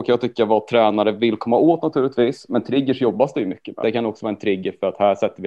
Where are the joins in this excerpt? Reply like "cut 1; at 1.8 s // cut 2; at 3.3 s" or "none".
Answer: cut 1; at 3.8 s